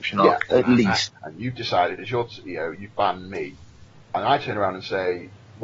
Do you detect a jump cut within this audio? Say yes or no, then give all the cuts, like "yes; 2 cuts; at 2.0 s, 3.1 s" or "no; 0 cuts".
yes; 1 cut; at 1.1 s